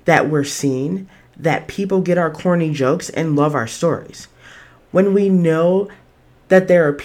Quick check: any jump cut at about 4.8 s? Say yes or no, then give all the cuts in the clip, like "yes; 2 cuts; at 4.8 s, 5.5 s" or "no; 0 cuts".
no; 0 cuts